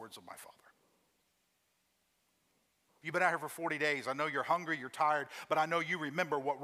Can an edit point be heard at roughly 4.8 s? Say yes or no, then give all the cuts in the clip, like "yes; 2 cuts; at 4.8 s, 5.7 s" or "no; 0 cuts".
no; 1 cut; at 3.0 s